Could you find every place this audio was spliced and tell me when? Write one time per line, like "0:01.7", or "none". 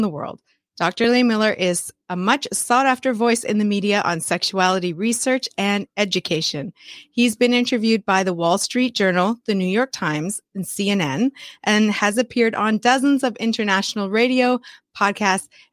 none